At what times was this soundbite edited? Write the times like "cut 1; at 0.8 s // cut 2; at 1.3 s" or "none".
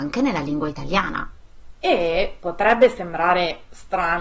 cut 1; at 1.7 s